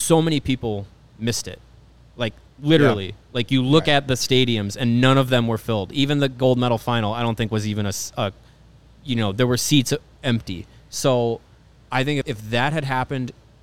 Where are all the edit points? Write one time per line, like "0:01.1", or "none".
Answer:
0:12.2

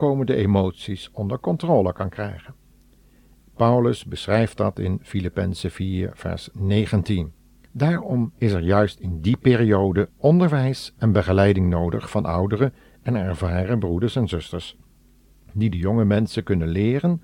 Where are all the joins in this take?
0:03.4
0:07.7

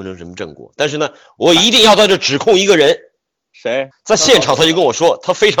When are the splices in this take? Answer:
0:03.9

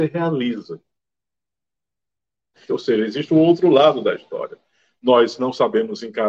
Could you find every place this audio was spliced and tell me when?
0:02.7

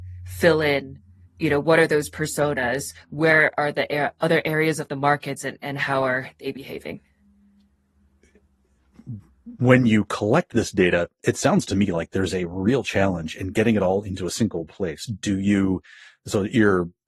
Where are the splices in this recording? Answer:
none

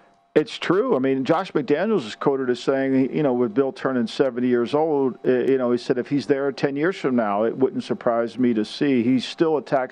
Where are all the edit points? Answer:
none

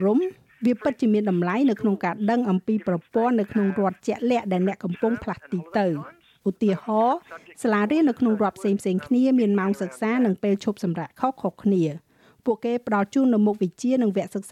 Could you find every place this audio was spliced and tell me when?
none

